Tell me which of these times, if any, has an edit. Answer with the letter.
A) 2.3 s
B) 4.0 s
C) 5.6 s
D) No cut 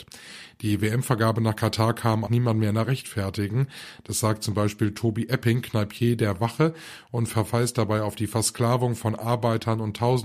A